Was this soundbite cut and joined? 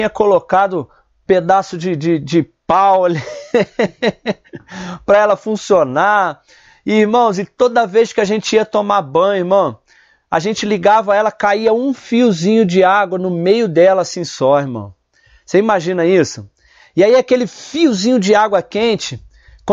no; 0 cuts

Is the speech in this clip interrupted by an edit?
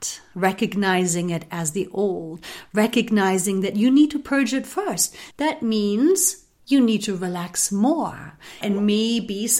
yes; 2 cuts; at 5.3 s, 8.6 s

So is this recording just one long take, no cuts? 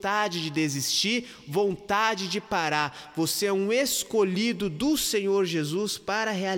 yes; 0 cuts

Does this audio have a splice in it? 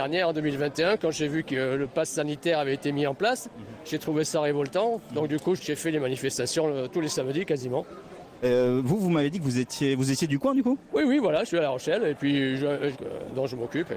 yes; 3 cuts; at 5.6 s, 8.4 s, 12.9 s

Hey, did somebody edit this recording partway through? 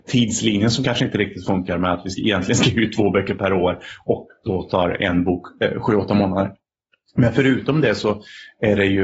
no; 0 cuts

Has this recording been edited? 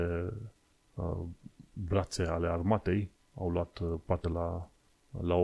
no; 0 cuts

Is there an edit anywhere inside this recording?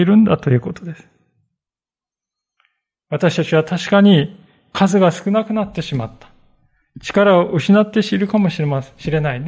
no; 0 cuts

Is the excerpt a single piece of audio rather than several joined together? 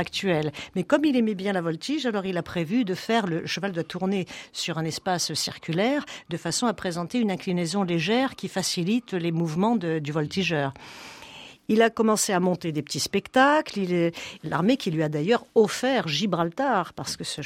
no; 1 cut; at 14.4 s

